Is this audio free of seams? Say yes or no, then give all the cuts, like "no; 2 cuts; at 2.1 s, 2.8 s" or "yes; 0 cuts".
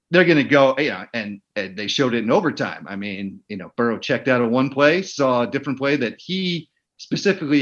yes; 0 cuts